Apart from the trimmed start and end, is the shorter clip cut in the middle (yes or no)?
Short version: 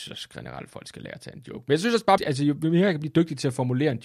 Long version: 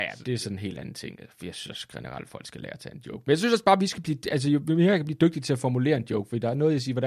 yes